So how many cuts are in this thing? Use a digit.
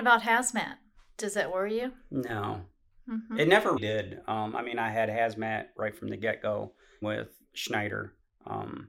2